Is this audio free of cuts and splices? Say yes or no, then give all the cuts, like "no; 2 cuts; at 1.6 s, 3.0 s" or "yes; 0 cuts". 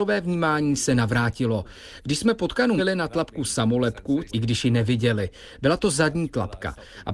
no; 2 cuts; at 2.8 s, 4.3 s